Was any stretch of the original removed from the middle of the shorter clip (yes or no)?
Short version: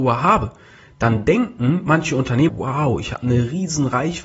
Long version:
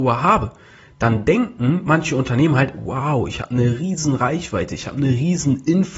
yes